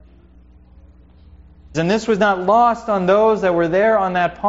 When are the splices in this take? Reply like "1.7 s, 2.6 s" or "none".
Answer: 1.7 s